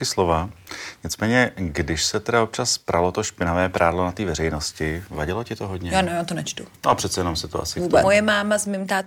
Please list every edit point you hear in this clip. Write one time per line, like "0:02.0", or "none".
0:06.8
0:08.0